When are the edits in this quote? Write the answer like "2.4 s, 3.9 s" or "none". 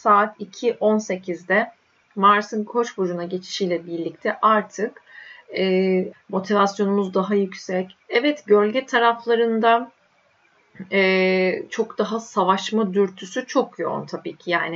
6.1 s, 8.0 s

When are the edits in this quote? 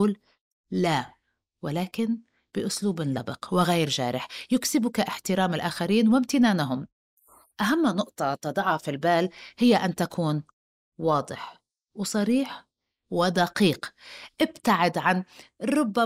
none

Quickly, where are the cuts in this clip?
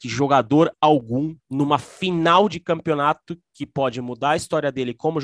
1.4 s

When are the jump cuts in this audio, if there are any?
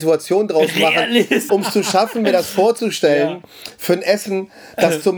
1.5 s

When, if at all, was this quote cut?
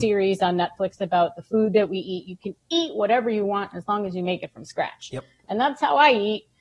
none

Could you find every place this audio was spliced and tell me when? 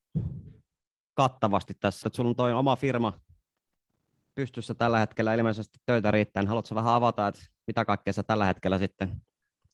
2.0 s

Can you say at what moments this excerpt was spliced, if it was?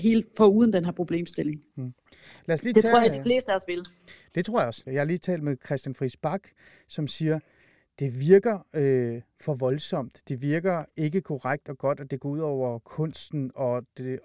4.9 s

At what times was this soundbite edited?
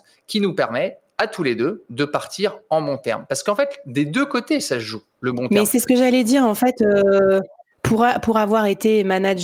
none

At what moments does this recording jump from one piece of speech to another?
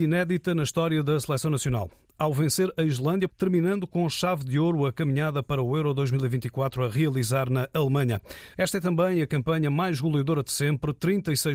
3.3 s, 8.5 s

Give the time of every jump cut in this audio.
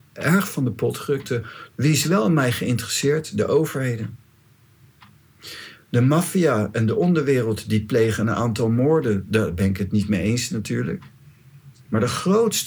1.7 s

